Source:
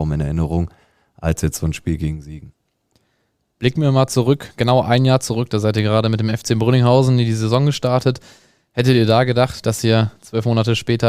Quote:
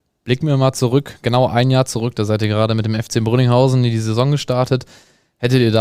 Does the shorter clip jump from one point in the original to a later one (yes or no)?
no